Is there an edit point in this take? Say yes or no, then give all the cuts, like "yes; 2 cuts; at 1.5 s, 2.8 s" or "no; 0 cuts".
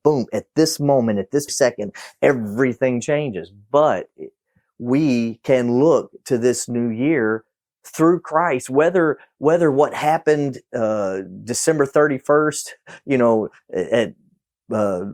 yes; 1 cut; at 1.5 s